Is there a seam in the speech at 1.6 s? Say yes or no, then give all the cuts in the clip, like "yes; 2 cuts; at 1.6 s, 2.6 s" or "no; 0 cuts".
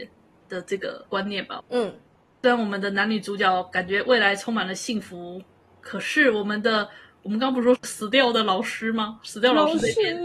yes; 1 cut; at 1.6 s